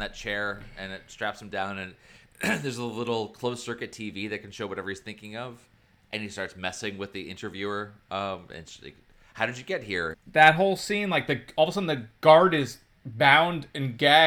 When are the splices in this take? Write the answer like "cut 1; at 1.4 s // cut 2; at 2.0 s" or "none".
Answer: cut 1; at 10.1 s